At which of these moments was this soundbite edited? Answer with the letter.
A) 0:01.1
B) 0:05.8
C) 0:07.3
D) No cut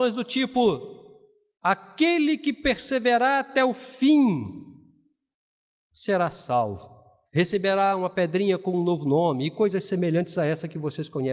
C